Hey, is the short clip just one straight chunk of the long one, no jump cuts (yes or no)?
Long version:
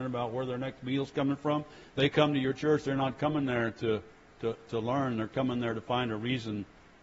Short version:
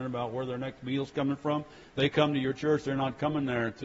yes